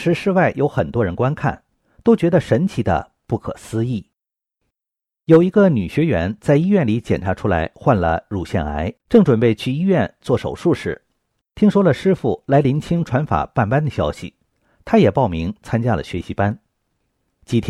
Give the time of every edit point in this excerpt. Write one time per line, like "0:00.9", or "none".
0:09.0